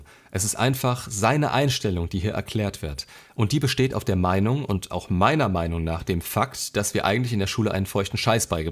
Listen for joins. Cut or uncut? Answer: uncut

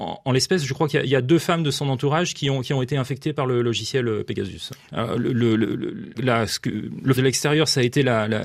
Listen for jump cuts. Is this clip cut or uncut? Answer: cut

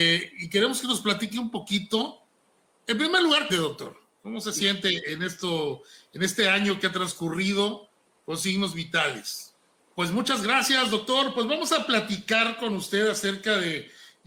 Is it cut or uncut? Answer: cut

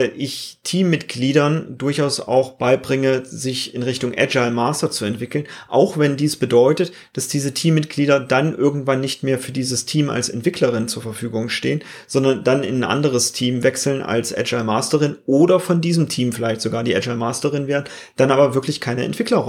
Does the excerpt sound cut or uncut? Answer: uncut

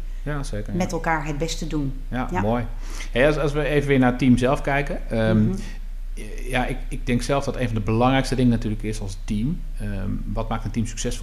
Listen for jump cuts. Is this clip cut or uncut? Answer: uncut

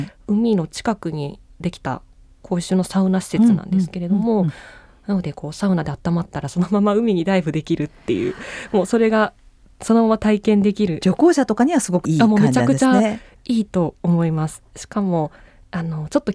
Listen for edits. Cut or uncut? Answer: uncut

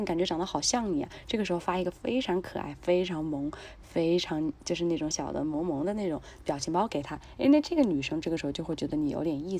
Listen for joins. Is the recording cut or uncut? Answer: cut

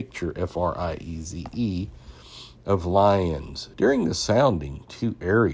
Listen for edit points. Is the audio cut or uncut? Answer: cut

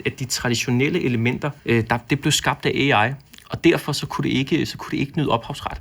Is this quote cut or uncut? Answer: cut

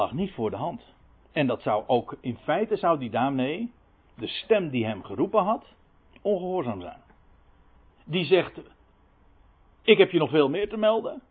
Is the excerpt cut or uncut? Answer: cut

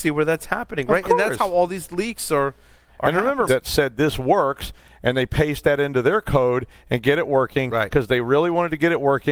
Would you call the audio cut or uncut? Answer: cut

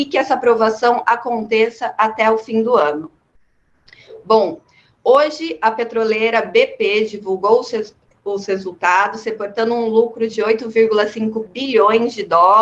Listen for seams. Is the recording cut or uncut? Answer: uncut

